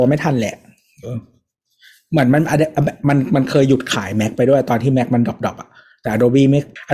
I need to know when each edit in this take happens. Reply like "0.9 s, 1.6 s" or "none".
1.0 s